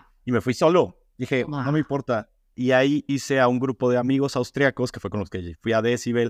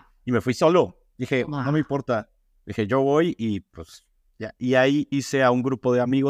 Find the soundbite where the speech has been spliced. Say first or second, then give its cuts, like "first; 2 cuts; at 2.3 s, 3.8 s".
first; 1 cut; at 2.5 s